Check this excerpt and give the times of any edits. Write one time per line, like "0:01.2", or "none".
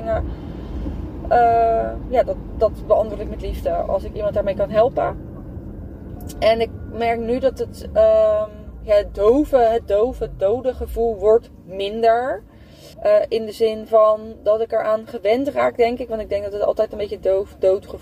0:12.9